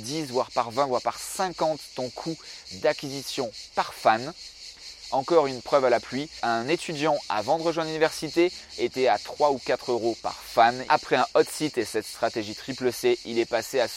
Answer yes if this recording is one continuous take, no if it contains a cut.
no